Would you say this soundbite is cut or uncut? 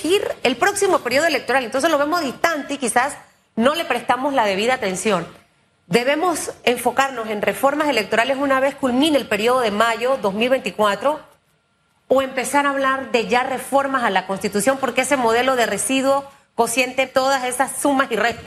cut